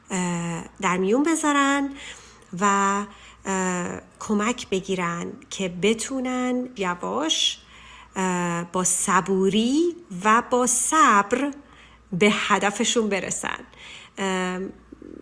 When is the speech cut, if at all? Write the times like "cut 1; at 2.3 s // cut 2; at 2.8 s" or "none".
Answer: cut 1; at 6.8 s